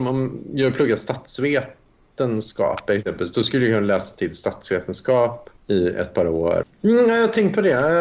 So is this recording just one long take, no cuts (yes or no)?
no